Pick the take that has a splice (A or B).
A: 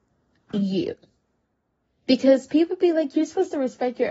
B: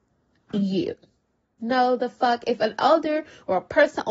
B